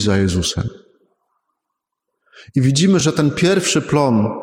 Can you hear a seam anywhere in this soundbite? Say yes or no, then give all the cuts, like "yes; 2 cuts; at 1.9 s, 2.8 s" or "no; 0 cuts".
no; 0 cuts